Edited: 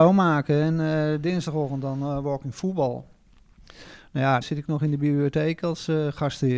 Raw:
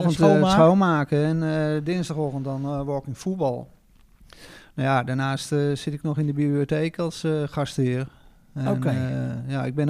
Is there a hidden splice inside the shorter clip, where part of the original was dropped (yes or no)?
yes